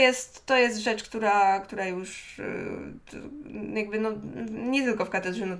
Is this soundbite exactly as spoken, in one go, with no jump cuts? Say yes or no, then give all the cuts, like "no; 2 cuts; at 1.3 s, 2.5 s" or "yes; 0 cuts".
yes; 0 cuts